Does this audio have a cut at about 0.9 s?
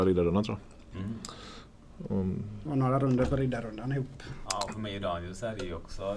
no; 2 cuts; at 2.7 s, 4.5 s

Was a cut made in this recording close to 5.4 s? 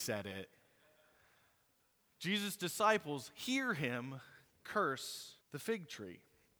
yes; 1 cut; at 5.4 s

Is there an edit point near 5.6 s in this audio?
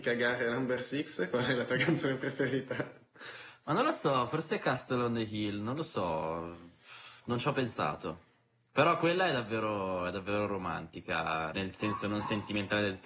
no; 1 cut; at 11.5 s

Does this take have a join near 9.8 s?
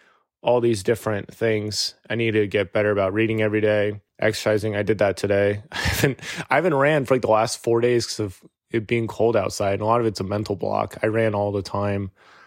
no; 1 cut; at 4.1 s

